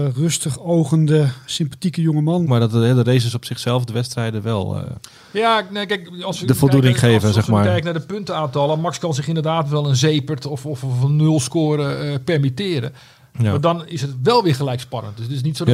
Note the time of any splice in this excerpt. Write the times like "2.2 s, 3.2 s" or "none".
2.5 s